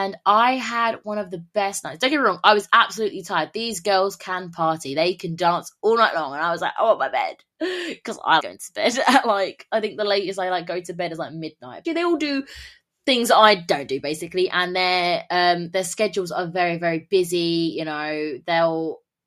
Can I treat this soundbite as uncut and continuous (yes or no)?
no